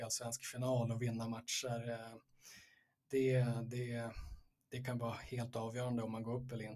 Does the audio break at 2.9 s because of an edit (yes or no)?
no